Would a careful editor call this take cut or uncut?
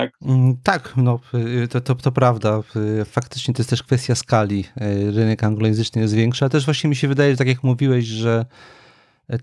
uncut